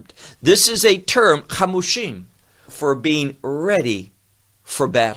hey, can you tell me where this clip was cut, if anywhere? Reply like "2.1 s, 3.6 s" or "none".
2.7 s